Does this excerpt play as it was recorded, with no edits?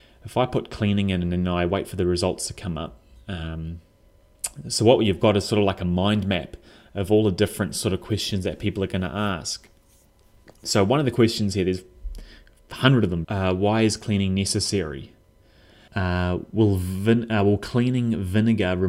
no; 2 cuts; at 13.2 s, 15.9 s

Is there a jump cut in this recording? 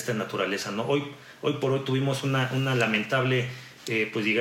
no; 0 cuts

